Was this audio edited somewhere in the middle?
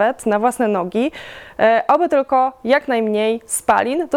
no; 0 cuts

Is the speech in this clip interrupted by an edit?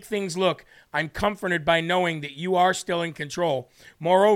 no; 0 cuts

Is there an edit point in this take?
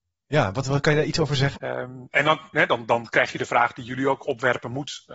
yes; 1 cut; at 1.5 s

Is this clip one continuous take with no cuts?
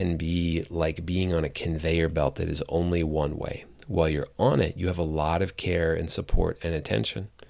yes; 0 cuts

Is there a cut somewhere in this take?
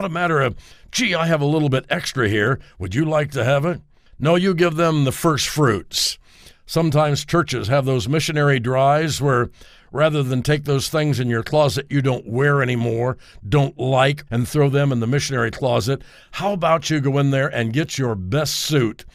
yes; 1 cut; at 14.3 s

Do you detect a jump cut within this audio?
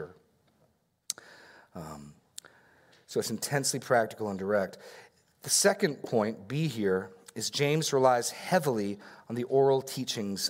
no; 0 cuts

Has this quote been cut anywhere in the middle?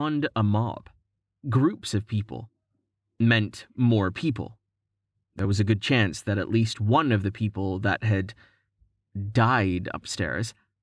yes; 1 cut; at 1.4 s

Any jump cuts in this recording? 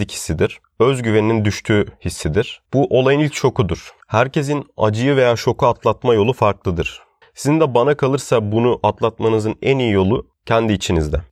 yes; 2 cuts; at 4.0 s, 7.2 s

